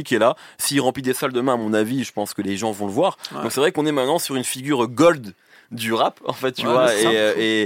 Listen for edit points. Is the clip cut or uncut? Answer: uncut